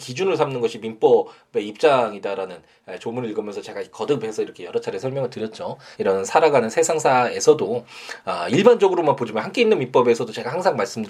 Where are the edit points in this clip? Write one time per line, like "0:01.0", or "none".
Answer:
0:05.9